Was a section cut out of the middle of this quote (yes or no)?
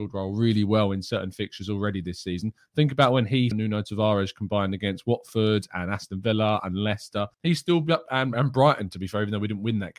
yes